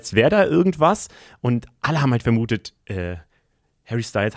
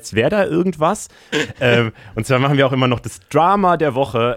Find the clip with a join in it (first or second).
second